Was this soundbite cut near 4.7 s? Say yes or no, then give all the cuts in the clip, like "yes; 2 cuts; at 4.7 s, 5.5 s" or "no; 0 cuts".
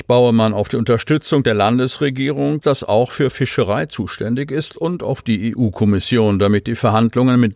no; 1 cut; at 2.6 s